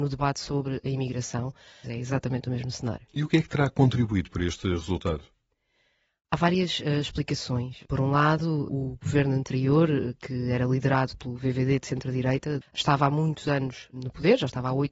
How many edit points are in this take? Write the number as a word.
two